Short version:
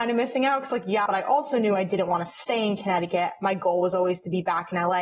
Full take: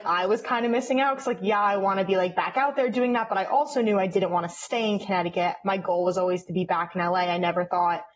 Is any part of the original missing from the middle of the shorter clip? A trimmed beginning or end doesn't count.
yes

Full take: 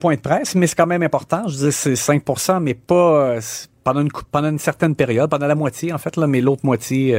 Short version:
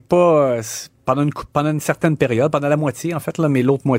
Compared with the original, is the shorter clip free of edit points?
yes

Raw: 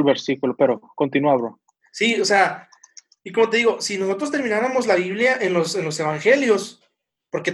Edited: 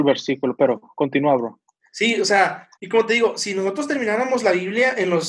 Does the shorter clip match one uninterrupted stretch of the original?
no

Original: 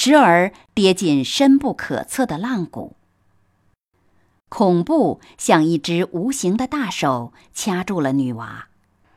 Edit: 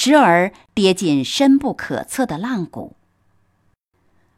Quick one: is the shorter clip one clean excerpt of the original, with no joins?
yes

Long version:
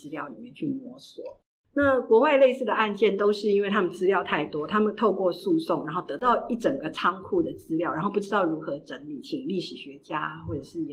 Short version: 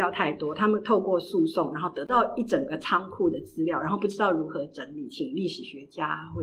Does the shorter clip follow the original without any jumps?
yes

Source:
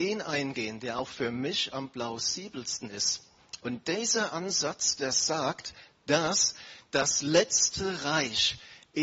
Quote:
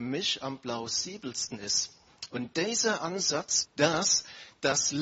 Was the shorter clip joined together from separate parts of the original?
yes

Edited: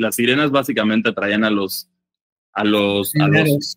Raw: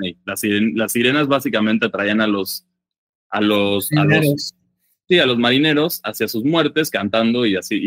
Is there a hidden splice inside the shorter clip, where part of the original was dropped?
no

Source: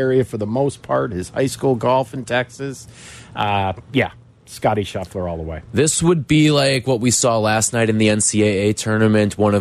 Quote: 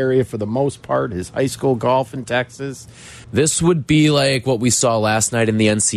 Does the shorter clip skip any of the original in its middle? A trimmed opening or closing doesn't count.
yes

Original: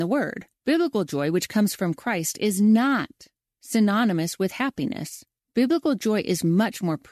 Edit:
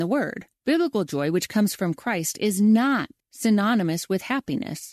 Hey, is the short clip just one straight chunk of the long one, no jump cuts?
no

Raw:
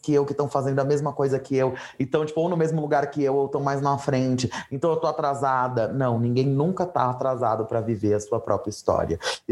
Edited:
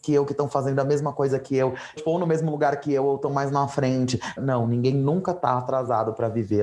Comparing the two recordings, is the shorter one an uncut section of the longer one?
no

